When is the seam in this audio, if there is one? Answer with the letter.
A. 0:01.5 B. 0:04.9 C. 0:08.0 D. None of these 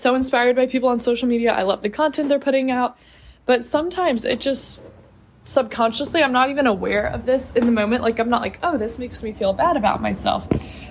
D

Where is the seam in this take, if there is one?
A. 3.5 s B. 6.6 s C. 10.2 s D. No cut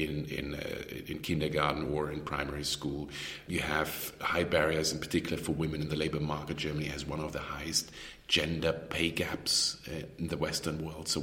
D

